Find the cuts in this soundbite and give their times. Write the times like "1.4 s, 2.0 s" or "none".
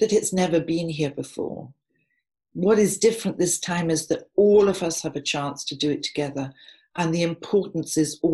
none